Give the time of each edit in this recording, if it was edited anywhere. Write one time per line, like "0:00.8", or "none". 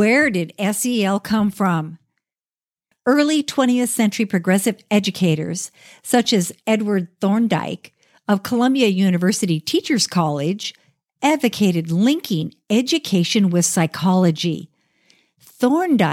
0:02.9